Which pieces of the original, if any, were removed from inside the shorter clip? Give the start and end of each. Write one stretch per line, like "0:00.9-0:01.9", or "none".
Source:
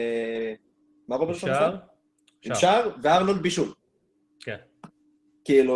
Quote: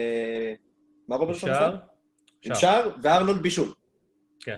none